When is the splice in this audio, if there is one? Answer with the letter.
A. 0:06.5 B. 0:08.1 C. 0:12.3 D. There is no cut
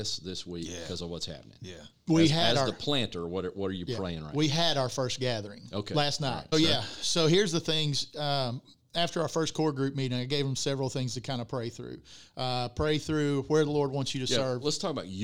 A